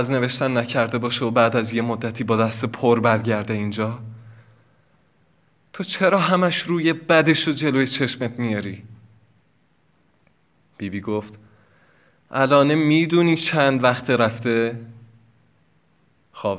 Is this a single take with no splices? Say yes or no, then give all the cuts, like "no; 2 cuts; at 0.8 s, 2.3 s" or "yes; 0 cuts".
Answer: yes; 0 cuts